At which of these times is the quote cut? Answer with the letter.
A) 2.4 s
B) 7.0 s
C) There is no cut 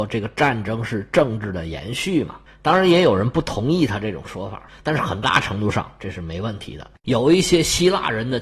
B